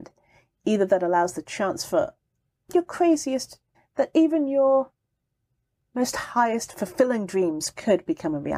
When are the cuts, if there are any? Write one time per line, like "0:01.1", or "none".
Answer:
0:03.7